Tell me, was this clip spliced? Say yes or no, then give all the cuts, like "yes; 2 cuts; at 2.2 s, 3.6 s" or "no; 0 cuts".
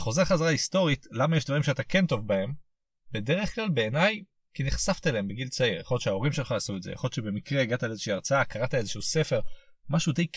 no; 0 cuts